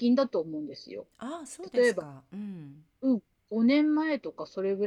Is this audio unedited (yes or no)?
yes